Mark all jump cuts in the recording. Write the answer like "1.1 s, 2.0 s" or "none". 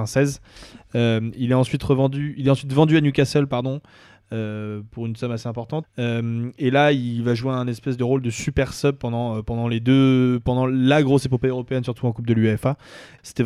5.8 s